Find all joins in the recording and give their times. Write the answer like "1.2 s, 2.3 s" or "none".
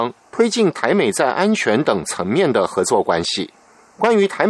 none